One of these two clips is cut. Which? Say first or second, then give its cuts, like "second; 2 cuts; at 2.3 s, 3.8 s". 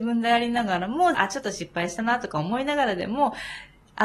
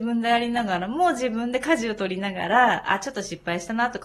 first; 1 cut; at 1.1 s